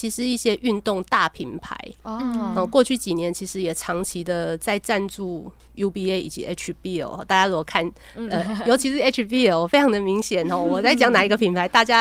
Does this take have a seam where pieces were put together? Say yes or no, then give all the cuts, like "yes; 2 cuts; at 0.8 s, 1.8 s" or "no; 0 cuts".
no; 0 cuts